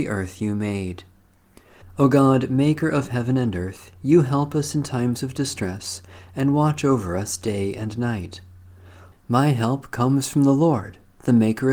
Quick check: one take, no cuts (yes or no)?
no